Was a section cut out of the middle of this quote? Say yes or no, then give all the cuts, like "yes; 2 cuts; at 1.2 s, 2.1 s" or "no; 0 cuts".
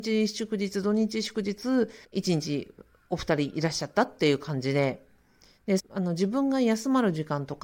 yes; 2 cuts; at 2.0 s, 5.8 s